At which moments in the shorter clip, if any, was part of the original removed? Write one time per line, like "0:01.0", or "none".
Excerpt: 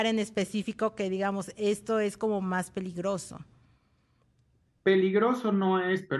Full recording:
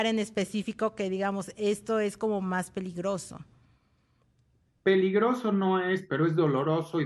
none